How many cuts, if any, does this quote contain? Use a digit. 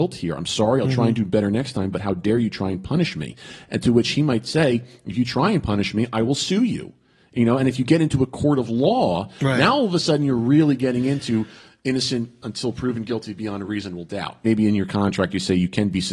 1